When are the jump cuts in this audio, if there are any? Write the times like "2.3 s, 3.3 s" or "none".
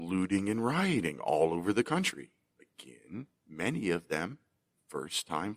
2.5 s